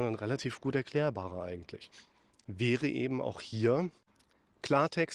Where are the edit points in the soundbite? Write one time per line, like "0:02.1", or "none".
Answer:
0:02.3